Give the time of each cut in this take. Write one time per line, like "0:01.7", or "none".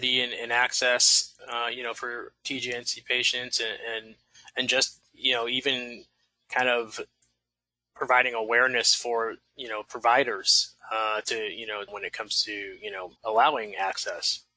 0:11.9
0:13.2